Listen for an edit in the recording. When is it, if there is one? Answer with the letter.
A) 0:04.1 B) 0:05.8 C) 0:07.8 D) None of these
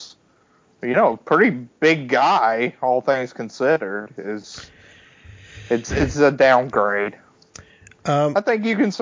B